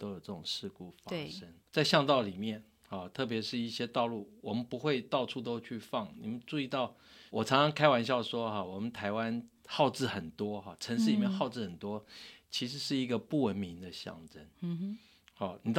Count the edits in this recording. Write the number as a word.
one